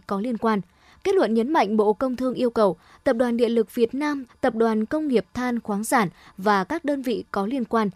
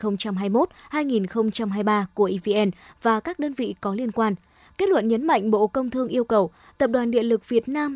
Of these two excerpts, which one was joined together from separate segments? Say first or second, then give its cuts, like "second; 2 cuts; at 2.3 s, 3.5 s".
first; 1 cut; at 4.3 s